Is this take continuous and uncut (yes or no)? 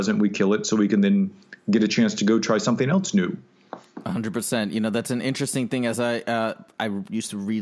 yes